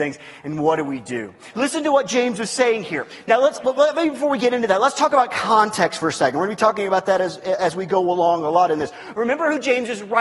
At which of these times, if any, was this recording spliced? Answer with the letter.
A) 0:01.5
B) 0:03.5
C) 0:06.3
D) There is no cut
A